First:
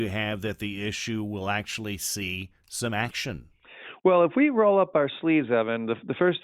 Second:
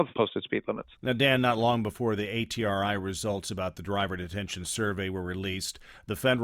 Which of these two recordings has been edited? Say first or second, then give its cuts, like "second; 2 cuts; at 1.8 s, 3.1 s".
second; 1 cut; at 1.0 s